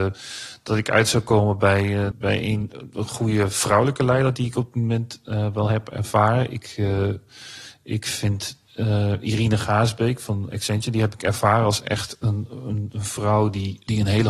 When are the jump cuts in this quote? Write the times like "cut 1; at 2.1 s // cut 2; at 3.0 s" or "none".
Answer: cut 1; at 2.1 s